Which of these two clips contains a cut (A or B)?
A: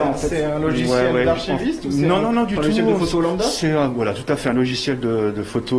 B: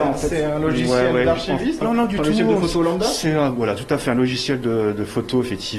B